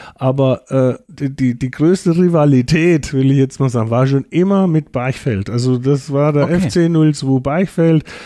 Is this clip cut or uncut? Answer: uncut